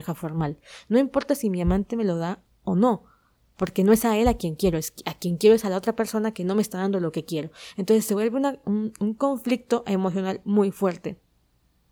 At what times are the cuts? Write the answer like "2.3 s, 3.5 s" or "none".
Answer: none